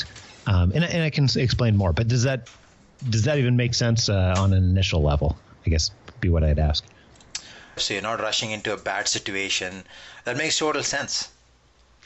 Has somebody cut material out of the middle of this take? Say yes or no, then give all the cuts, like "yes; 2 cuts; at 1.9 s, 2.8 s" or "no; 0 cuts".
yes; 1 cut; at 7.8 s